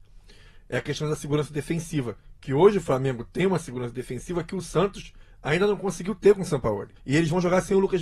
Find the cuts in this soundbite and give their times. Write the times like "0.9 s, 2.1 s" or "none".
7.0 s